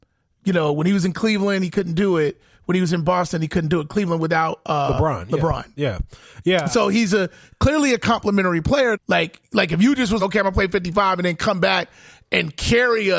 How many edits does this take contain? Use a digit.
2